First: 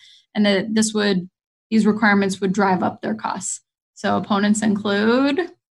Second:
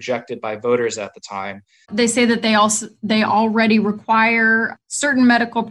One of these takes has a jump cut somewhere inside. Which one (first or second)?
second